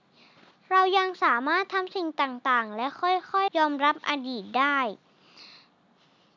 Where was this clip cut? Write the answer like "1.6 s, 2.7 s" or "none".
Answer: 3.5 s